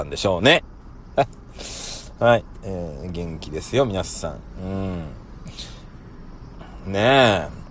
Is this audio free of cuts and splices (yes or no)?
no